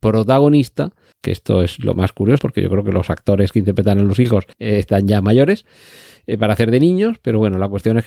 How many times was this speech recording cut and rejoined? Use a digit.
3